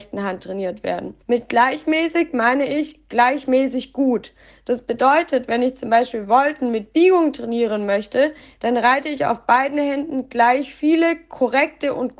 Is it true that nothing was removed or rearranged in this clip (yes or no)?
no